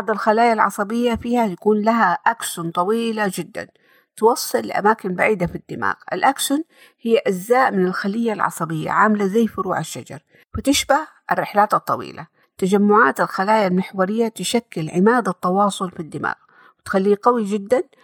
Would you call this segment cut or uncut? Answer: uncut